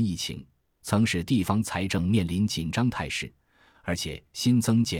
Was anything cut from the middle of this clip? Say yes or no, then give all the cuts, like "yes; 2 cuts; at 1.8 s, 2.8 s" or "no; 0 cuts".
yes; 1 cut; at 3.7 s